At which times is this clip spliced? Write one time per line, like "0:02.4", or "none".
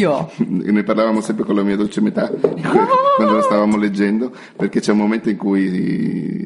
none